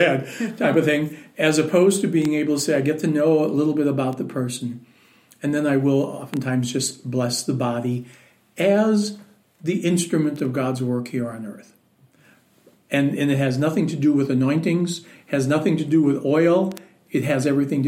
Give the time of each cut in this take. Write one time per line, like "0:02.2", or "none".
none